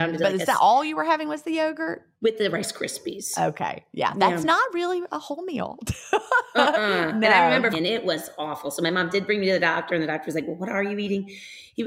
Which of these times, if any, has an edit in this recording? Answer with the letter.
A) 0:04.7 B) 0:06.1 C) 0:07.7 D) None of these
C